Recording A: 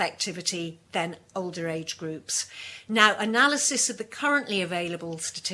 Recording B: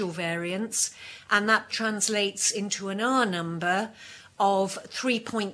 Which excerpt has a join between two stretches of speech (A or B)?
B